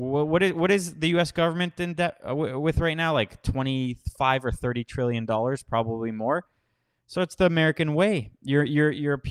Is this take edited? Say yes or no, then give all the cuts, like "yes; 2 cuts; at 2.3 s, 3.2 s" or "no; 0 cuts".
no; 0 cuts